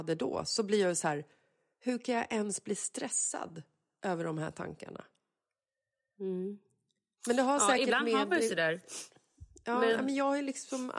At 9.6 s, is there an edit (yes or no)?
no